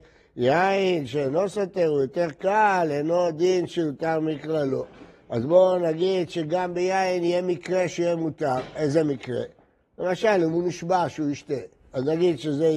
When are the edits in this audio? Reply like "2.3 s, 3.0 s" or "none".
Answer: none